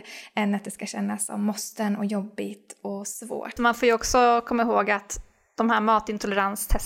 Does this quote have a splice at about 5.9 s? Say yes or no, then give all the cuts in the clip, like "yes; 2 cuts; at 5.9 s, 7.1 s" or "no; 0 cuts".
no; 1 cut; at 3.6 s